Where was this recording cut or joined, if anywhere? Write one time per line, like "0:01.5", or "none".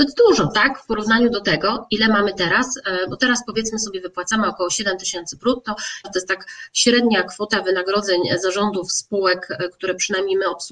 0:06.0